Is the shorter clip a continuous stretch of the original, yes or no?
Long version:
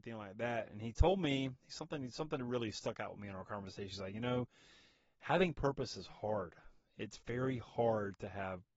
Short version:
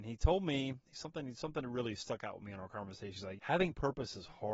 no